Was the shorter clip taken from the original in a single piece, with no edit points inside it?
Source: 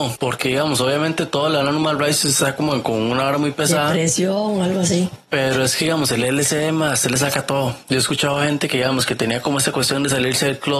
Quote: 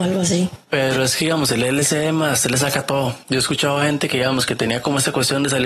yes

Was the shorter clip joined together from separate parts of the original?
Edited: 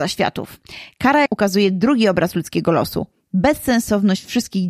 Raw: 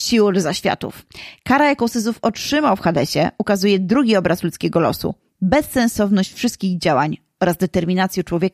yes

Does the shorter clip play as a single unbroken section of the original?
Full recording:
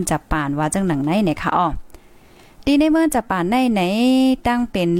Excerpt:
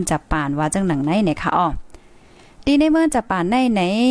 yes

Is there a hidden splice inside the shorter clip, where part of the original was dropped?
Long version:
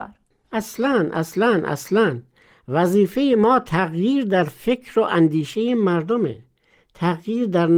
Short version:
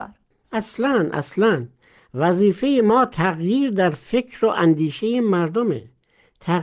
yes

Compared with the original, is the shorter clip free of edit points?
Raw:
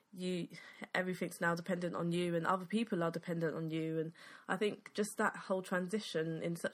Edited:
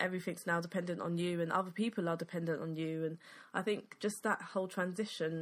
yes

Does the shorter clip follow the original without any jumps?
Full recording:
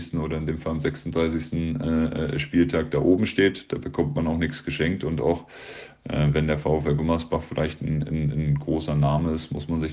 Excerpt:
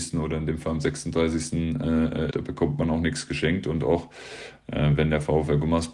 no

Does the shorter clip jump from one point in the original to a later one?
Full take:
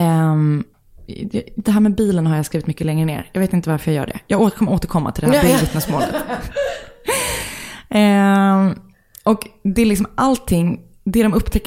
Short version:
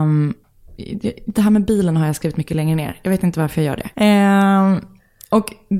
yes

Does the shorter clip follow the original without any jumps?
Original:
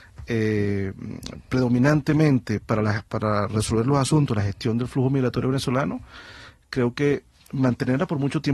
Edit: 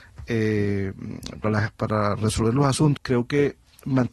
no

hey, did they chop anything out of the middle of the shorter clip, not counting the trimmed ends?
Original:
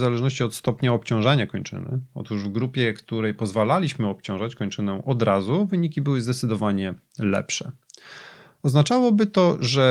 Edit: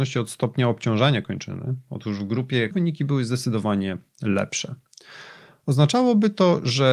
yes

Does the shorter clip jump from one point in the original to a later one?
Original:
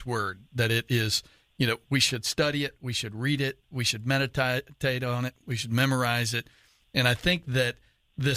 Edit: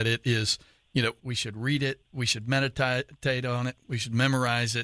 yes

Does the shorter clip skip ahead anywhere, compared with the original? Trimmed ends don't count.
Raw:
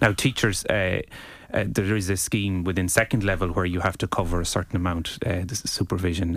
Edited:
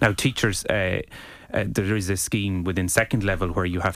no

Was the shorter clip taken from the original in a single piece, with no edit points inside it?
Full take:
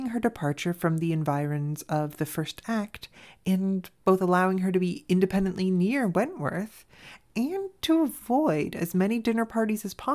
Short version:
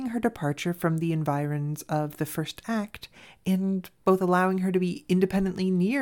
yes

